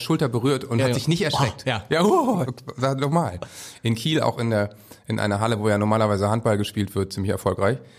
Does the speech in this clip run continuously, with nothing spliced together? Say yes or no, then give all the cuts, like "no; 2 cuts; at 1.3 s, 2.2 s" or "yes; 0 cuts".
no; 1 cut; at 2.4 s